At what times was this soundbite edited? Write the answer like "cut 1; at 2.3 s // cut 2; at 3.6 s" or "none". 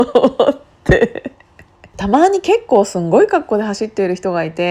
cut 1; at 1.9 s

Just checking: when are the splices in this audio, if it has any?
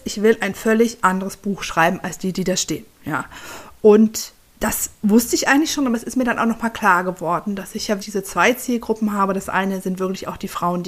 cut 1; at 8.0 s

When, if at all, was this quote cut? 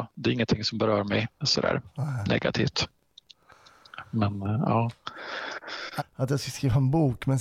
cut 1; at 1.4 s // cut 2; at 6.0 s

